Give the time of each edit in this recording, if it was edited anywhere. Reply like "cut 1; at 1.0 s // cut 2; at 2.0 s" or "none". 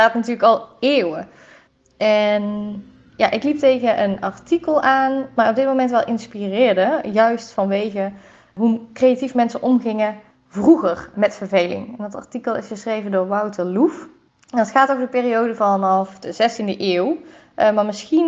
none